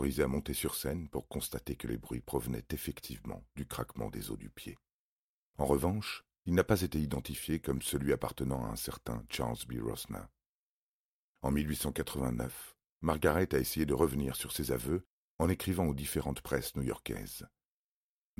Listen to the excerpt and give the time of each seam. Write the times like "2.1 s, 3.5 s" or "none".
5.5 s